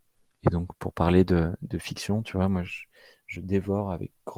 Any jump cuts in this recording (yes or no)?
no